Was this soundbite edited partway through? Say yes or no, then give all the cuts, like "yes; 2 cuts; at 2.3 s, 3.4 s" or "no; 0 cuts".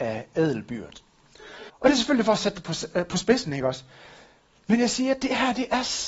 yes; 1 cut; at 1.7 s